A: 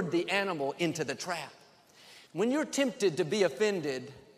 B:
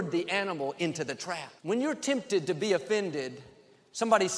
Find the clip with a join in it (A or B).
B